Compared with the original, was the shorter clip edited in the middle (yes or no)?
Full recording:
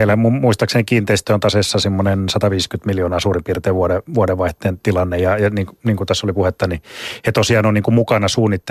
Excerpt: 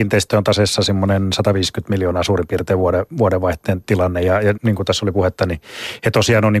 yes